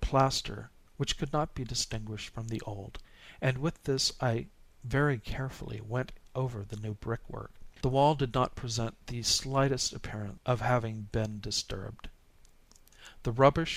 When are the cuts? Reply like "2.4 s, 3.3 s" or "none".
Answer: 7.8 s